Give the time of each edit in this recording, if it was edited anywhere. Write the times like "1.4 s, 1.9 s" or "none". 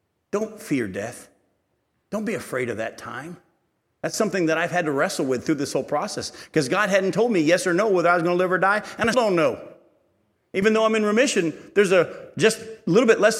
9.1 s